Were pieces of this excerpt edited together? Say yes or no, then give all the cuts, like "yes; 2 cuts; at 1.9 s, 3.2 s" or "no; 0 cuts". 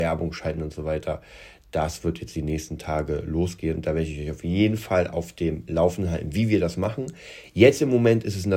no; 0 cuts